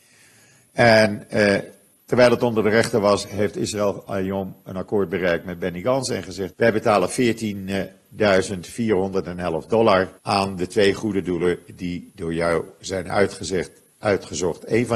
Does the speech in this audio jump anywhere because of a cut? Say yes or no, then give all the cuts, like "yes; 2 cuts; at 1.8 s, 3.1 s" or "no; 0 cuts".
yes; 3 cuts; at 2.0 s, 6.5 s, 10.2 s